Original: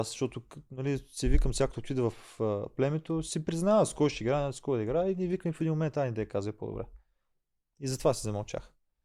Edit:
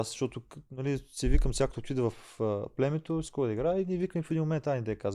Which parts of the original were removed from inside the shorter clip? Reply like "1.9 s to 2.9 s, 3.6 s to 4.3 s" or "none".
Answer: 3.2 s to 4.5 s